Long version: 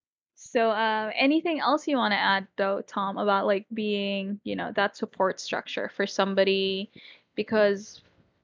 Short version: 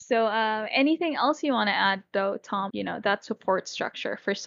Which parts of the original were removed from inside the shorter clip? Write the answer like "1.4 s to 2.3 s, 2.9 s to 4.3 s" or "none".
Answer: 3.1 s to 4.4 s